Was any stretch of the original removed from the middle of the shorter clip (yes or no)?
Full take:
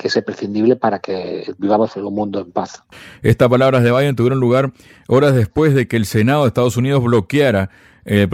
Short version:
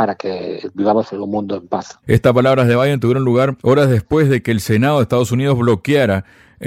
yes